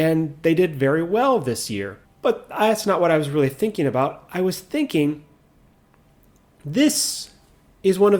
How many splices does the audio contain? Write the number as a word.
one